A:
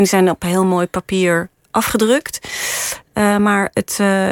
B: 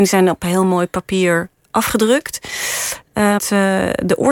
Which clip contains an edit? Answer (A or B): B